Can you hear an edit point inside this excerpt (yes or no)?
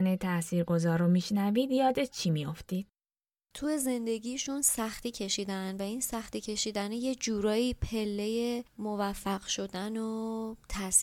yes